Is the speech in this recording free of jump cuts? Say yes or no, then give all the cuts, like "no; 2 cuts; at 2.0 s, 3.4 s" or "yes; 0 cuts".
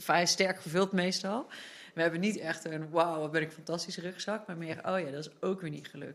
yes; 0 cuts